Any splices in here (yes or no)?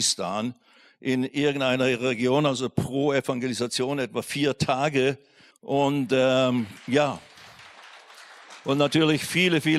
yes